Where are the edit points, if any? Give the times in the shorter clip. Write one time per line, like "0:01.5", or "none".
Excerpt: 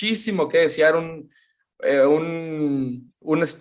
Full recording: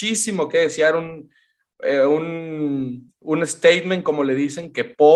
none